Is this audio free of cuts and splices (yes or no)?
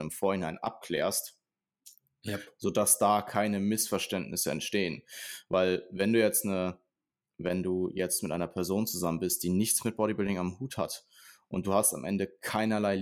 yes